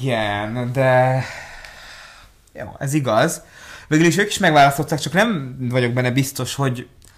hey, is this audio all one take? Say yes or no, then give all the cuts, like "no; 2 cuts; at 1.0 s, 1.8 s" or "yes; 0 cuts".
yes; 0 cuts